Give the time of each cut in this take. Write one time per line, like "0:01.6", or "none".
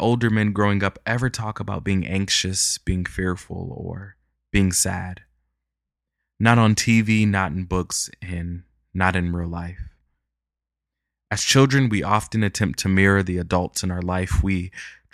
none